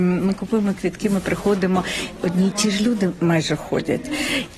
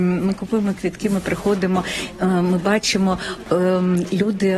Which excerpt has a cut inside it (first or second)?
first